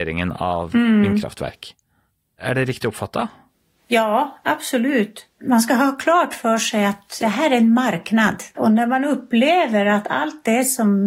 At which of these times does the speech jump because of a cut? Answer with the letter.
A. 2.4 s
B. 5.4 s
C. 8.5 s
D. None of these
C